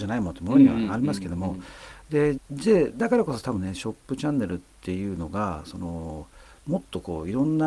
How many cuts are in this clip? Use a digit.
1